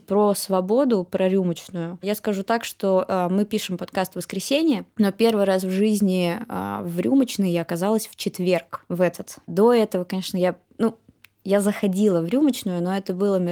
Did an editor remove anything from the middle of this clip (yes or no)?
no